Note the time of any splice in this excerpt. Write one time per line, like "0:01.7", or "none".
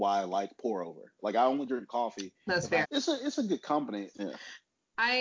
0:02.8
0:04.1

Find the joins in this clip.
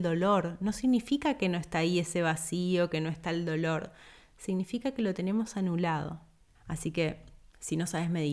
0:06.6

